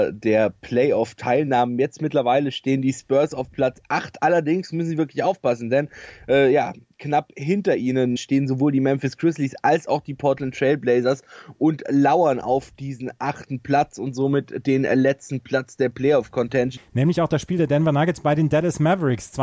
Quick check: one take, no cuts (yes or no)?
no